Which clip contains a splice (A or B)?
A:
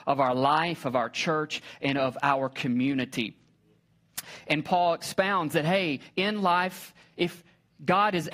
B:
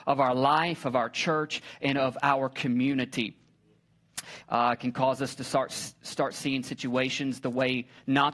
B